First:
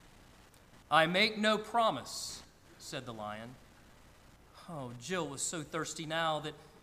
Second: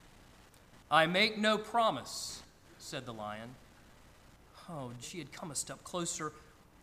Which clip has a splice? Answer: second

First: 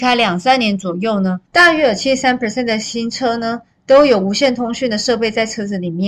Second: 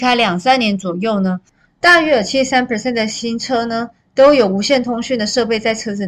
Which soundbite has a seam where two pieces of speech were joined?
first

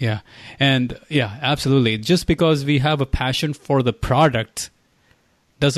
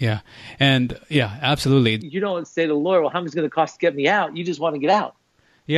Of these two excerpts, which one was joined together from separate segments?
second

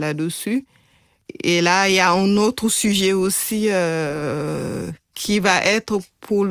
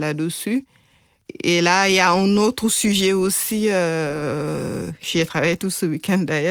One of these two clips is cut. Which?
first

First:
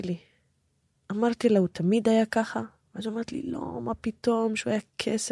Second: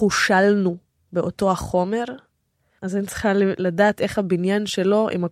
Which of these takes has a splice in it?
second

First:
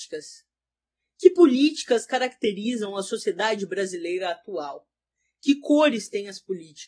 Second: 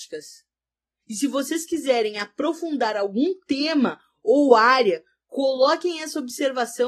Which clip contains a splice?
second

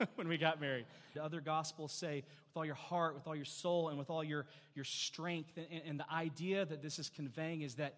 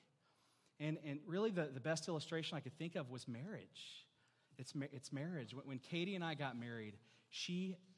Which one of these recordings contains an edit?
first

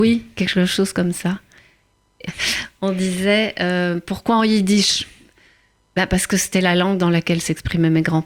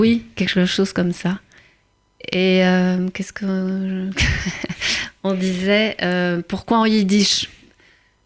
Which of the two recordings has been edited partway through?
first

